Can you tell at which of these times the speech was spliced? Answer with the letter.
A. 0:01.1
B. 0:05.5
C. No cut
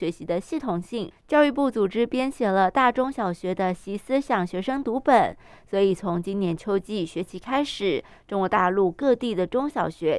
A